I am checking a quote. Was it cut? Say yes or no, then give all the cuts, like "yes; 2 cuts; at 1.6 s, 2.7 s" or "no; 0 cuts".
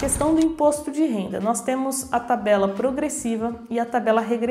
no; 0 cuts